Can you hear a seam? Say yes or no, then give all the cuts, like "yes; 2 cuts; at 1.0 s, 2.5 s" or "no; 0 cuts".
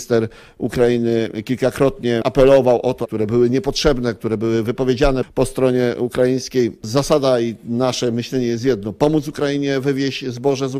yes; 2 cuts; at 3.0 s, 6.8 s